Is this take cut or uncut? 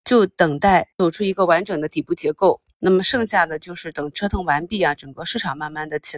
uncut